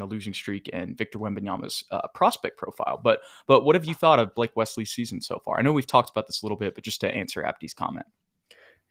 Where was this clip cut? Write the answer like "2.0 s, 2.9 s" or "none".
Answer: none